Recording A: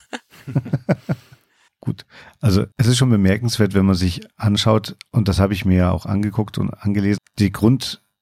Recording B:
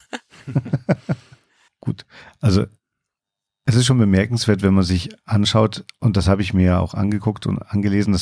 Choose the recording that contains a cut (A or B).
A